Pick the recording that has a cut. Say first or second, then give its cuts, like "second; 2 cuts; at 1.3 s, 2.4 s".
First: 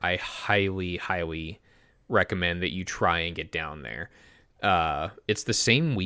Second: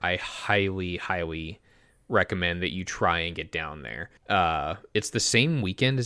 second; 1 cut; at 4.2 s